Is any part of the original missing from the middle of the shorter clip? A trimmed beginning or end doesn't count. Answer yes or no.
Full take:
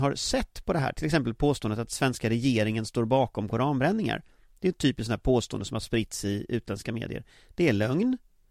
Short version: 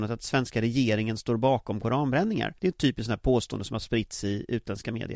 yes